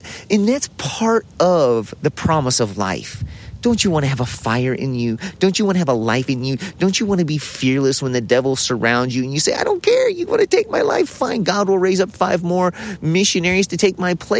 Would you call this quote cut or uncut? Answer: uncut